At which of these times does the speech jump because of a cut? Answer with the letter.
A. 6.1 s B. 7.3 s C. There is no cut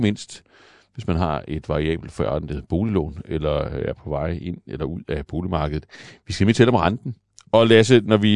B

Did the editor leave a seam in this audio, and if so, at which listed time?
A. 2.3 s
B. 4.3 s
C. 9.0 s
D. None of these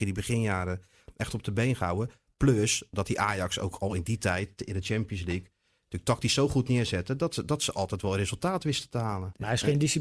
D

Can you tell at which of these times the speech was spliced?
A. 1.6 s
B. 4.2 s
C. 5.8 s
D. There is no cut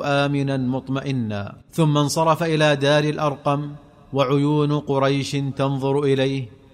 A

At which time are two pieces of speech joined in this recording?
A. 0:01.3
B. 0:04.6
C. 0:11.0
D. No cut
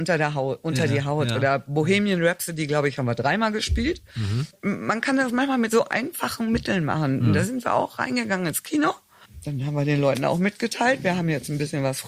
D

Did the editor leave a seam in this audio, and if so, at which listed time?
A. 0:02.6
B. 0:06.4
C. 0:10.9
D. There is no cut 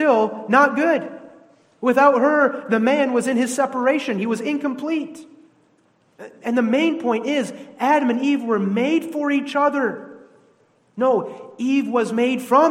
C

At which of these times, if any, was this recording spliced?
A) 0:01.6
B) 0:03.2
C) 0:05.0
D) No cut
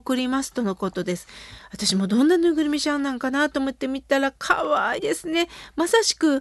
C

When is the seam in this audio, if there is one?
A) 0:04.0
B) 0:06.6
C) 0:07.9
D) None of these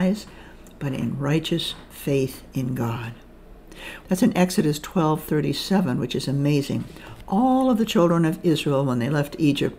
A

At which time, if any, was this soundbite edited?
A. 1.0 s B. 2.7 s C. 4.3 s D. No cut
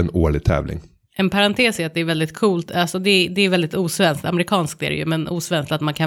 D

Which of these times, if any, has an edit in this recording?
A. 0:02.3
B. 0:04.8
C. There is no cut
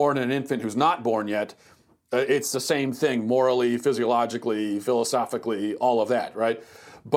C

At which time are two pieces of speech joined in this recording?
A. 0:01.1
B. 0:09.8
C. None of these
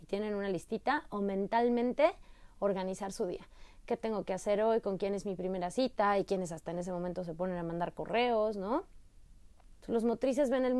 B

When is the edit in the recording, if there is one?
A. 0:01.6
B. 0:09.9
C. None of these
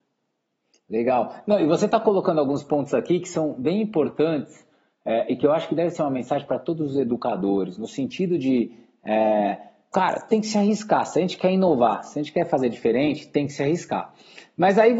B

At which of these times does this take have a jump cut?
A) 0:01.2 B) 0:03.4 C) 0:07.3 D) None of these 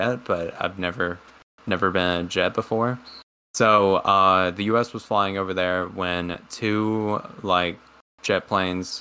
B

